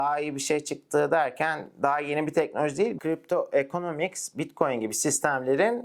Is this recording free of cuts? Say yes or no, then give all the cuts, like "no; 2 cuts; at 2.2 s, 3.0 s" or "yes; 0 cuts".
no; 1 cut; at 3.0 s